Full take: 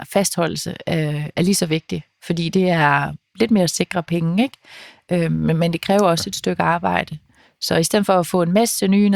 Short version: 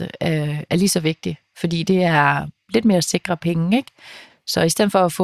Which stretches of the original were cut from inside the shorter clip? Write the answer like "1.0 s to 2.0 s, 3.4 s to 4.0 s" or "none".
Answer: 5.0 s to 7.4 s